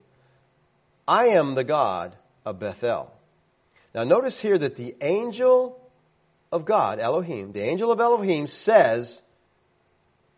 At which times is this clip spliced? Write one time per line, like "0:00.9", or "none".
none

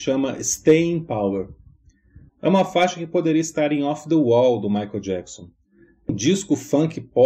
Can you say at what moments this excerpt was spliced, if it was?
0:02.3
0:06.1

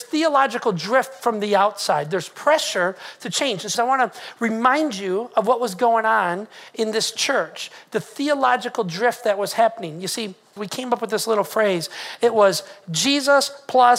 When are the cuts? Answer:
0:03.7
0:10.6

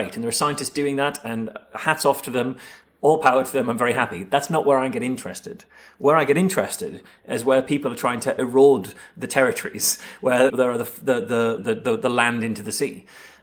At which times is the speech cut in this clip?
0:10.5
0:11.6

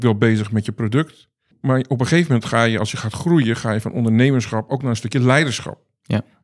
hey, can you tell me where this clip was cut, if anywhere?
none

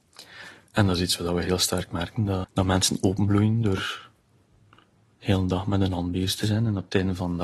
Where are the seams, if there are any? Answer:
0:02.4

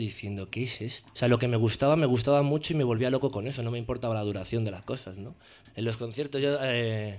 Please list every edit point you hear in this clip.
0:01.1
0:05.6

